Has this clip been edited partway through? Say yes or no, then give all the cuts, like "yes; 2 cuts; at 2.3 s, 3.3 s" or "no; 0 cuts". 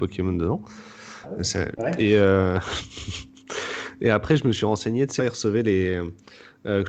yes; 2 cuts; at 1.7 s, 5.2 s